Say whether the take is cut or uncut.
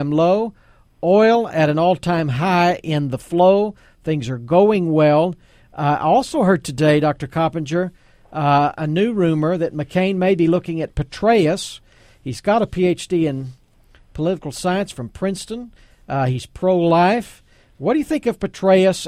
uncut